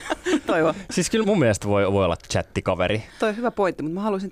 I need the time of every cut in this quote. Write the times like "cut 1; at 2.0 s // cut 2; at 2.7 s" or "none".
cut 1; at 1.2 s // cut 2; at 3.1 s